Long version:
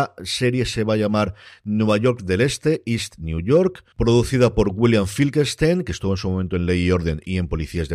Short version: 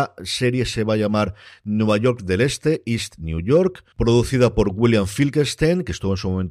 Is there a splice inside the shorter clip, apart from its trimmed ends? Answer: no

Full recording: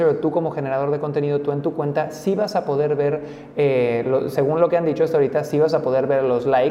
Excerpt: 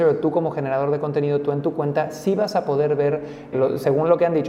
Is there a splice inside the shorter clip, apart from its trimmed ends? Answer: yes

